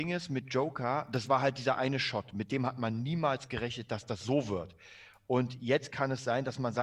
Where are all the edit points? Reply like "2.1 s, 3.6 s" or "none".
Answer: none